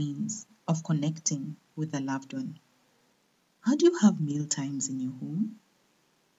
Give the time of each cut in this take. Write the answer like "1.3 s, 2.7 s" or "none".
none